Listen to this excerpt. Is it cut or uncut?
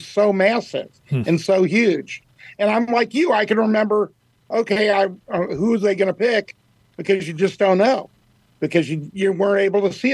uncut